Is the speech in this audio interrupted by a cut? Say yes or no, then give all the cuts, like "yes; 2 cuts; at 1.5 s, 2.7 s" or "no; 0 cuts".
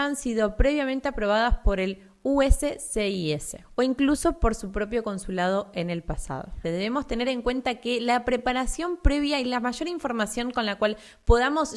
yes; 1 cut; at 6.6 s